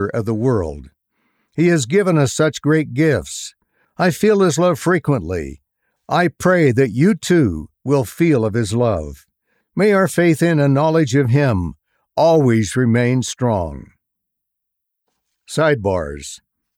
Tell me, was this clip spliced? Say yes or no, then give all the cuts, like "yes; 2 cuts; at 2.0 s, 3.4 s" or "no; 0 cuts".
no; 0 cuts